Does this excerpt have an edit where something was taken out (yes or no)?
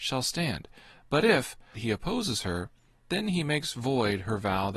yes